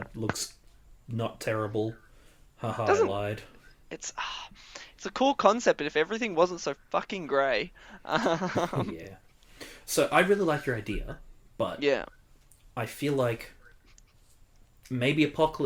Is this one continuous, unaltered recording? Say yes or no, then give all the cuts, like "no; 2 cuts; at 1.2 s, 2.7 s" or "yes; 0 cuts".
yes; 0 cuts